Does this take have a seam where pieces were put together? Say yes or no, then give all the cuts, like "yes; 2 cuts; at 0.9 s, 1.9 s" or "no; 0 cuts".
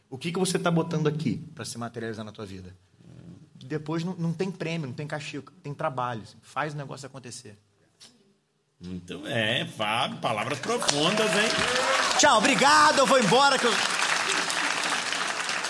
no; 0 cuts